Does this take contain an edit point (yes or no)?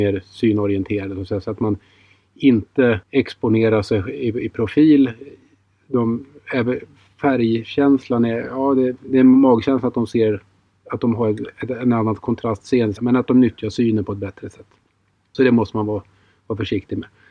yes